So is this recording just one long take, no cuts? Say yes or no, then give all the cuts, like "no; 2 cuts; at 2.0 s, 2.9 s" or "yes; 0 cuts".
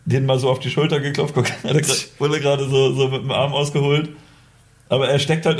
yes; 0 cuts